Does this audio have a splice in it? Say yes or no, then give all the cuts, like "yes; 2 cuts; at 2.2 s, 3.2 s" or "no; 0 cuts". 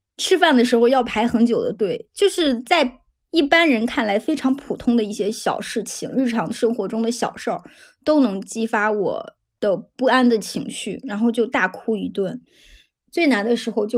no; 0 cuts